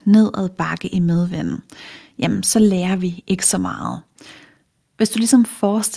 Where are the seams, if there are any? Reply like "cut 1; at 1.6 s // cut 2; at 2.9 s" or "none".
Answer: cut 1; at 4.8 s